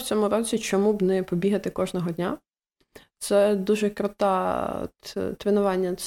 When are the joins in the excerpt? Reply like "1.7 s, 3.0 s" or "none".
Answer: none